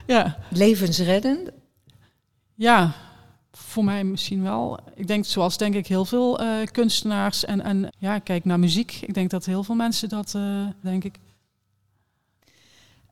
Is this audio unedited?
no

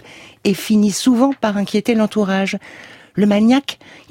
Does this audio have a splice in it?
no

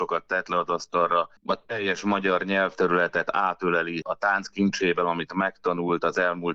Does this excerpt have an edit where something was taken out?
yes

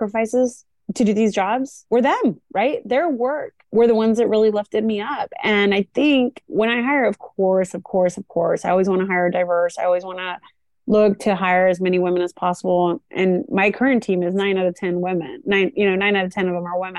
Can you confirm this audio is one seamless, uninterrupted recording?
yes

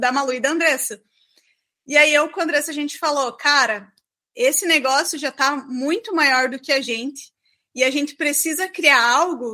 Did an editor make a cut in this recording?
no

